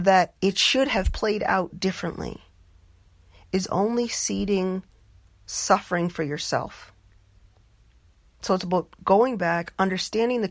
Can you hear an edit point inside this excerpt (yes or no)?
no